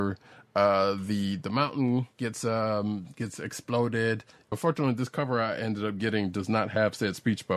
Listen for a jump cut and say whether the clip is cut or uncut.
cut